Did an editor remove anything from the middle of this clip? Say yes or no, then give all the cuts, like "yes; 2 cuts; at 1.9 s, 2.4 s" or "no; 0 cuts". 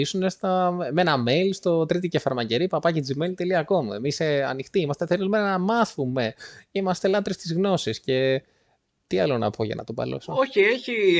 no; 0 cuts